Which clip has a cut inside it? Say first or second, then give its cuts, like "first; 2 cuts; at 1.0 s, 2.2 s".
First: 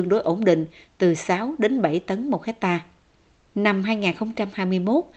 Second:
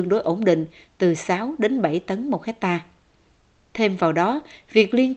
first; 1 cut; at 3.4 s